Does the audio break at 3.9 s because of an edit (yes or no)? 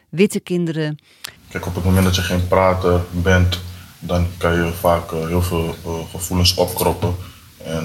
no